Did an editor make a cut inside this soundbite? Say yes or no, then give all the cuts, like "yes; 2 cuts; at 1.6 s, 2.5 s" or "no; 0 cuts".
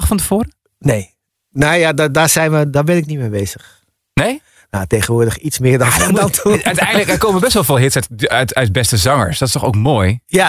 no; 0 cuts